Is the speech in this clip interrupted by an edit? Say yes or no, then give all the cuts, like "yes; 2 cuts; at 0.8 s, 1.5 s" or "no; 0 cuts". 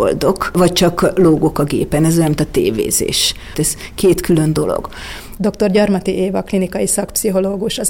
yes; 2 cuts; at 3.5 s, 5.4 s